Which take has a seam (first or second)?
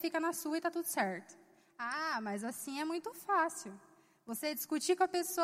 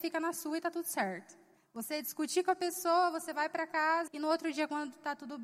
second